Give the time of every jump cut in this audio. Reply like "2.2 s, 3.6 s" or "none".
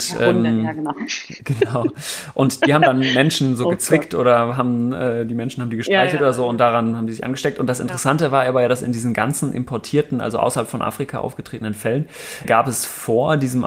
12.4 s